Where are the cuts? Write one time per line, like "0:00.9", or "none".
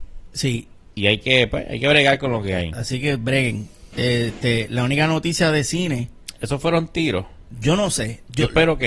none